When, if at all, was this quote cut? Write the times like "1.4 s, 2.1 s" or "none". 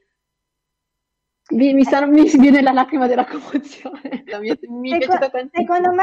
4.3 s